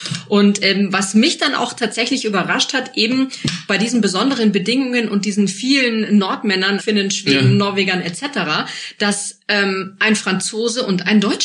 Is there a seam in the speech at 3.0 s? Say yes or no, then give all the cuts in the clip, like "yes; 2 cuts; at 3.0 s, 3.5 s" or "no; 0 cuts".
no; 1 cut; at 6.8 s